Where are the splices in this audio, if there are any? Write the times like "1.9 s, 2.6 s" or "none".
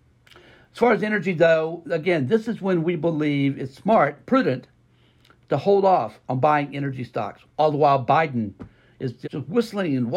7.4 s, 9.2 s